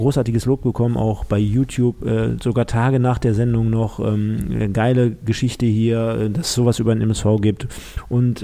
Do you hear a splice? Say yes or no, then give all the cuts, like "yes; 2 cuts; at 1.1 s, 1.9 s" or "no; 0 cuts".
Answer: no; 0 cuts